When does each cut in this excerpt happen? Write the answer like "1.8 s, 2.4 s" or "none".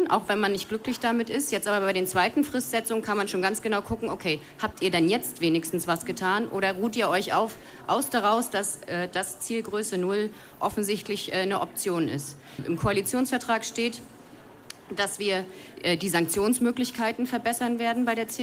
12.6 s